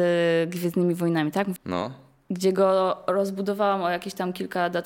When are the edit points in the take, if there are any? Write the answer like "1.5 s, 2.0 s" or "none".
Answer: 1.6 s